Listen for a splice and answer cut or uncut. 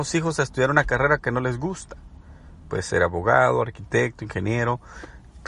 uncut